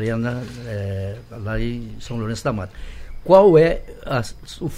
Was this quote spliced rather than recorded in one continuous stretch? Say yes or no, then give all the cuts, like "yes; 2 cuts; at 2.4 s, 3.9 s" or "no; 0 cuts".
no; 0 cuts